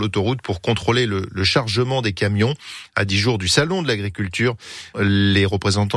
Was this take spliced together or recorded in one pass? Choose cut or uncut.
cut